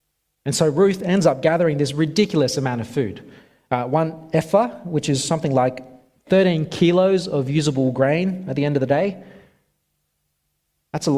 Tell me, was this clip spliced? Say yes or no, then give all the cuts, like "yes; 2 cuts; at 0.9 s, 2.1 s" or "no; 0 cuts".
no; 0 cuts